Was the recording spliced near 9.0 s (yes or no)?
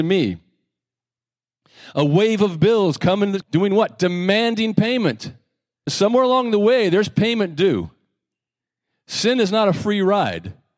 no